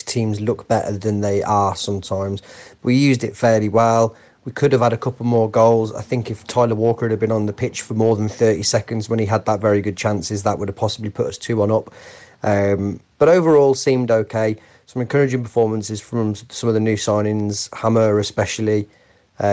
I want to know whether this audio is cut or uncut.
uncut